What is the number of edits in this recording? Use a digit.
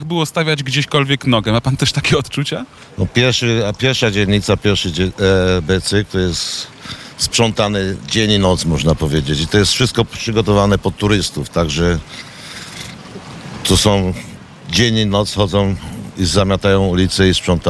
0